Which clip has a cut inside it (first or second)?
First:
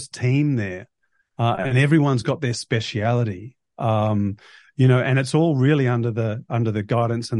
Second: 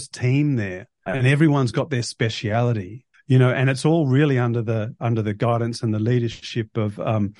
second